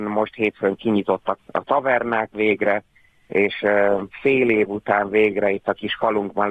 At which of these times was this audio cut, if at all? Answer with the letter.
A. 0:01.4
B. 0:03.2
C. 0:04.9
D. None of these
A